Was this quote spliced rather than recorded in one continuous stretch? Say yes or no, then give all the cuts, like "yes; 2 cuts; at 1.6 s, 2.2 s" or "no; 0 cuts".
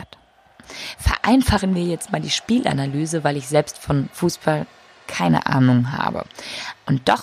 no; 0 cuts